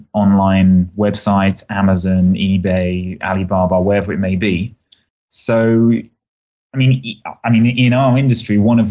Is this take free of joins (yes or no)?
no